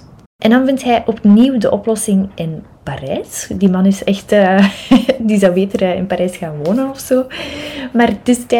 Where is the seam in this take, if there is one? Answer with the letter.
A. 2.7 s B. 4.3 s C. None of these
A